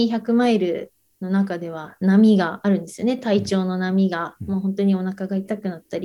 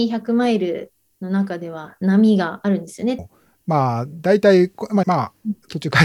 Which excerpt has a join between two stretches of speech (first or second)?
second